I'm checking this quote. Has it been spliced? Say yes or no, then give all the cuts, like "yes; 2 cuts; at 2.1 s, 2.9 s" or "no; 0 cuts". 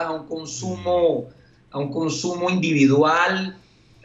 no; 0 cuts